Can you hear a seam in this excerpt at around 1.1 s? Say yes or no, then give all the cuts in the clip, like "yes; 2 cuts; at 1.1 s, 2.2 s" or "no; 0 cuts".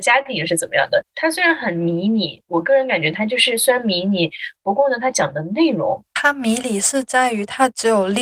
no; 1 cut; at 6.1 s